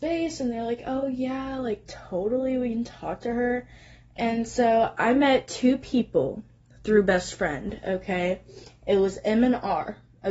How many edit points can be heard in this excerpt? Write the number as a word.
zero